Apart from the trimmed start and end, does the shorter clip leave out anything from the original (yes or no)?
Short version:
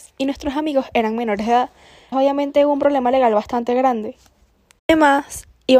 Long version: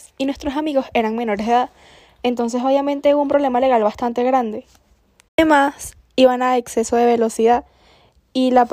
yes